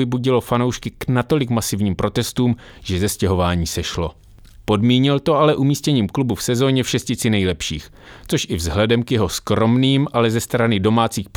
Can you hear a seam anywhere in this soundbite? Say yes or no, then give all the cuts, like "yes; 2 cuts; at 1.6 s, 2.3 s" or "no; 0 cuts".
yes; 1 cut; at 4.6 s